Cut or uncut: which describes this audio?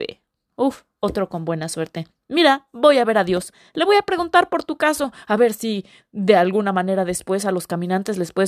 uncut